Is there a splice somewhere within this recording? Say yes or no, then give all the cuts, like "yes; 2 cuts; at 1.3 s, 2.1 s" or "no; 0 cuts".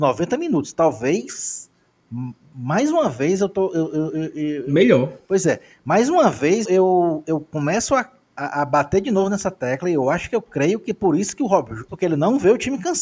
yes; 2 cuts; at 6.6 s, 11.9 s